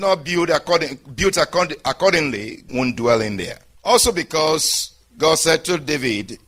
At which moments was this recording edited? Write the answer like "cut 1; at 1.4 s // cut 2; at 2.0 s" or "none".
cut 1; at 2.7 s // cut 2; at 3.7 s